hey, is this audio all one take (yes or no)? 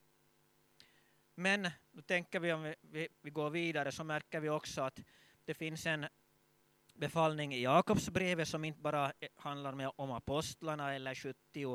no